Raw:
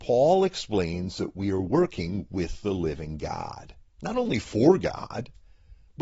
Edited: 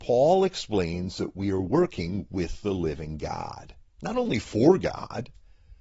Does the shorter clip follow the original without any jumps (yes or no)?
yes